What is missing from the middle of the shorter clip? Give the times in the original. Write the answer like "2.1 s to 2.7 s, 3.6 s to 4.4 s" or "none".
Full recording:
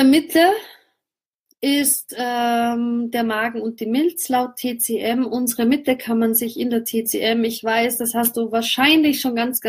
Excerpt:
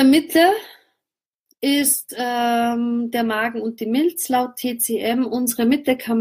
none